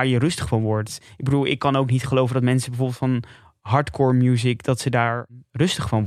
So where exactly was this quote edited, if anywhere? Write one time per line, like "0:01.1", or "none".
none